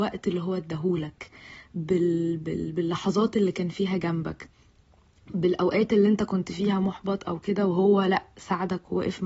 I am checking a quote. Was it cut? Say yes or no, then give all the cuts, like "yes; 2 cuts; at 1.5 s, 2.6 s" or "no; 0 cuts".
no; 0 cuts